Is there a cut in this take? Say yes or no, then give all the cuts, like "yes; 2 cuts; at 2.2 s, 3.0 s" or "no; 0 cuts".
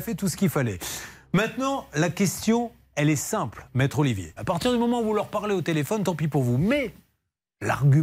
yes; 1 cut; at 4.4 s